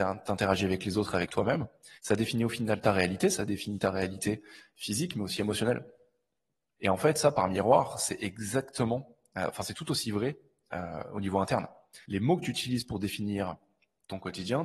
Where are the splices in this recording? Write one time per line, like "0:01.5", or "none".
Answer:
0:02.0
0:06.8
0:12.0